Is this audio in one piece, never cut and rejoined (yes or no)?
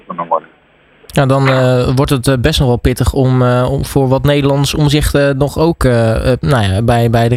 yes